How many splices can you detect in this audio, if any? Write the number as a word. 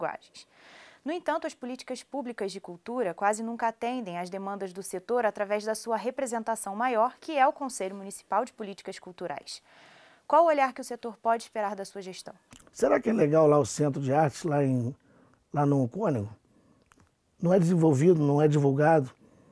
one